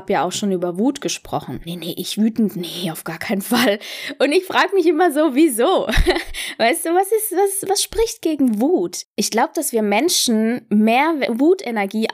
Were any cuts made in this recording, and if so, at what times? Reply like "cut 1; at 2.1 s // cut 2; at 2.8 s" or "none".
cut 1; at 1.6 s